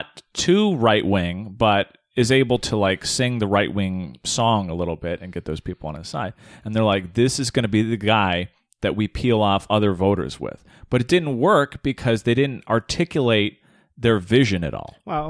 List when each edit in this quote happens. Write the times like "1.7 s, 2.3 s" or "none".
none